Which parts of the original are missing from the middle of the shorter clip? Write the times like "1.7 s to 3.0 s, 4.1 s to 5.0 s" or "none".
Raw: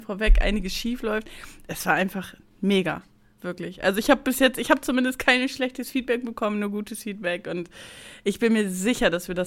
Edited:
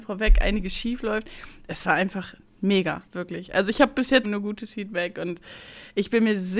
3.1 s to 3.4 s, 4.5 s to 6.5 s